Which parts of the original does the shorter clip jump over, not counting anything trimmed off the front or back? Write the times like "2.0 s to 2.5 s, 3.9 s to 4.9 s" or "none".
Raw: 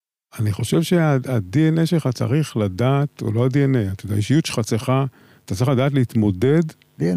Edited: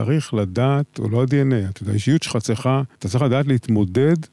5.2 s to 5.4 s